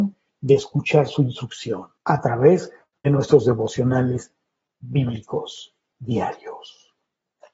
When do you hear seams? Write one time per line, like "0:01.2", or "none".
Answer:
0:02.0
0:05.9